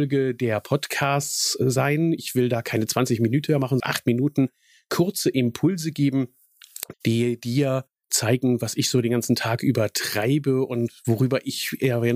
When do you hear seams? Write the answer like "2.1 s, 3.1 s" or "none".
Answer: 3.8 s, 6.9 s

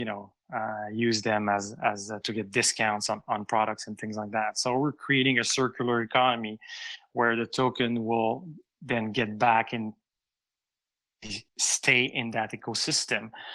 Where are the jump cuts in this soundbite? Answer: 11.5 s

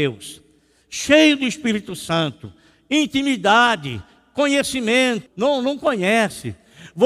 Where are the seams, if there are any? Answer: 5.3 s

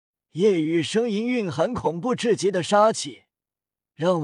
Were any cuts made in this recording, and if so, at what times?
none

